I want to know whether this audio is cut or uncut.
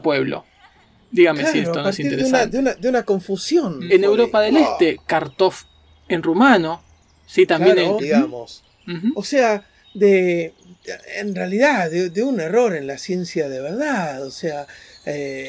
cut